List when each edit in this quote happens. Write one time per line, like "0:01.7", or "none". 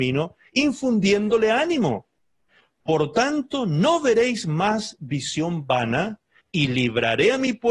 0:06.4